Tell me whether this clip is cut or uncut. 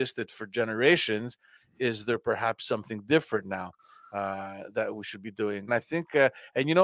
cut